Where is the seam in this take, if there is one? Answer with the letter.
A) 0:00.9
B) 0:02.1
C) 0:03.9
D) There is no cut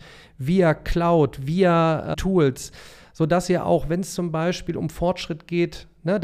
B